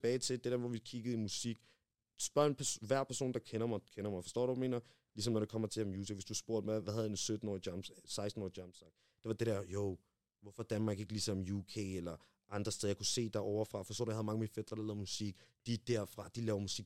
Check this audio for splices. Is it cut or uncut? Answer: uncut